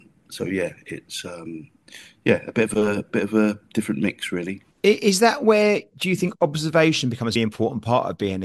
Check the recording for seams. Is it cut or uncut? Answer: cut